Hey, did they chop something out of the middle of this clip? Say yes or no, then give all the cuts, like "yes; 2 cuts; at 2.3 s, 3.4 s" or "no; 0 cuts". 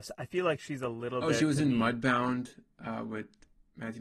no; 0 cuts